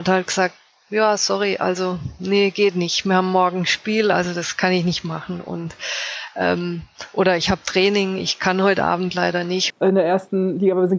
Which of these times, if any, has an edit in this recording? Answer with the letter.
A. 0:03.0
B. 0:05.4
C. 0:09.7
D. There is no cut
C